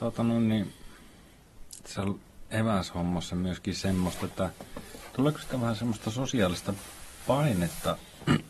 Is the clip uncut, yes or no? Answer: yes